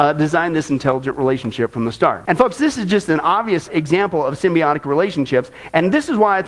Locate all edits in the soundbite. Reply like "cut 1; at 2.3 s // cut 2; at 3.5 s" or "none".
cut 1; at 2.2 s // cut 2; at 3.7 s